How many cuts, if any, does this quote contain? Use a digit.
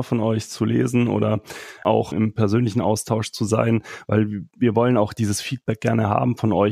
0